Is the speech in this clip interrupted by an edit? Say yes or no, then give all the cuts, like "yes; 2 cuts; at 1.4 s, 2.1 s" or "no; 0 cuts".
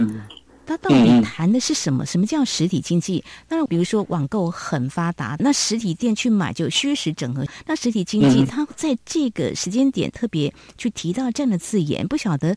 yes; 1 cut; at 3.7 s